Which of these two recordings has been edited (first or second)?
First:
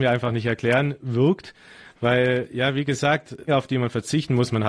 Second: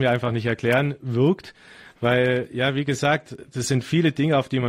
first